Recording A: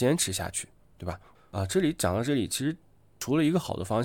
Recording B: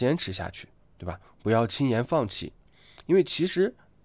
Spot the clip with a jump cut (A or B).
A